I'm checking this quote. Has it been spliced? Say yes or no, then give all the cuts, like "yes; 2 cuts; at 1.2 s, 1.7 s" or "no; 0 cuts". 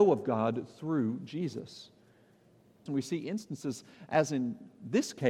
yes; 1 cut; at 2.9 s